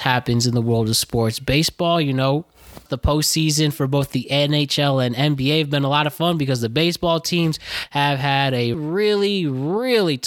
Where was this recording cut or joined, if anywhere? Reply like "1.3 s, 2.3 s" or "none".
2.9 s, 8.7 s